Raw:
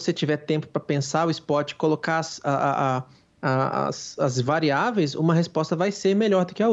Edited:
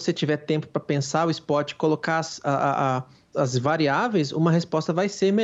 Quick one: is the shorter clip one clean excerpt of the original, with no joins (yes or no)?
no